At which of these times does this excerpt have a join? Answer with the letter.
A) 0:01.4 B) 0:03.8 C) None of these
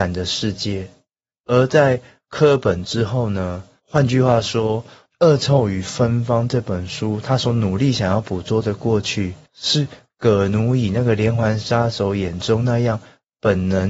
B